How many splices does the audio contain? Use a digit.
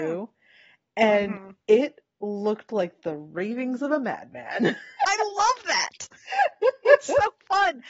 1